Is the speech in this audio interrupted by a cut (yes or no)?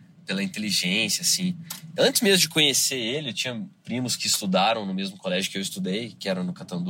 no